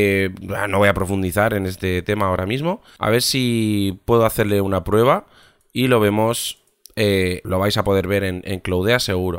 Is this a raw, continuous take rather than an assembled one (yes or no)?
no